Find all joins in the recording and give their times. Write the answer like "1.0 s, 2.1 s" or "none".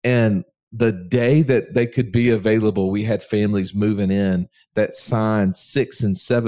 none